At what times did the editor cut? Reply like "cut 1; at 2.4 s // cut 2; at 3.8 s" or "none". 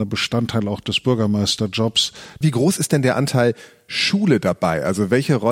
cut 1; at 2.4 s